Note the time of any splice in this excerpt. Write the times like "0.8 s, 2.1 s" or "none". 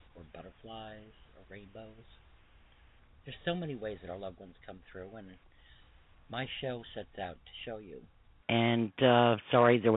8.4 s